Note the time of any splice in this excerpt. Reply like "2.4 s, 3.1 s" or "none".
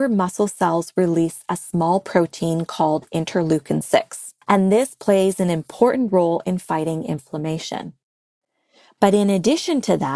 4.4 s